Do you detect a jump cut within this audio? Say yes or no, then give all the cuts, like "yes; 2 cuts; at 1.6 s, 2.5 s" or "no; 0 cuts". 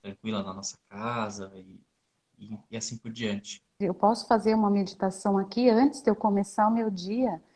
yes; 1 cut; at 3.8 s